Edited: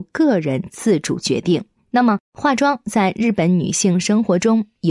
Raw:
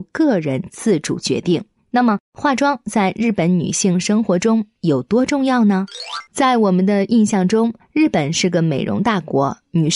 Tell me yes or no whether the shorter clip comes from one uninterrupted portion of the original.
yes